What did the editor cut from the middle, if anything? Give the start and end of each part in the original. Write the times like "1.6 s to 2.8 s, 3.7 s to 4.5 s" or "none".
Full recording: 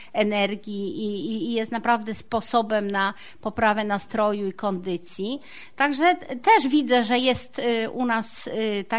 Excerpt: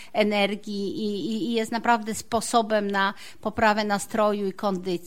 none